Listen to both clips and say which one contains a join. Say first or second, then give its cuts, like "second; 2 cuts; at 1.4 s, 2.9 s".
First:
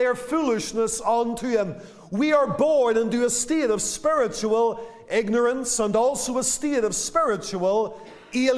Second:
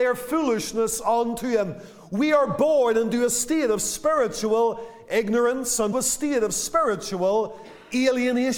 second; 1 cut; at 5.9 s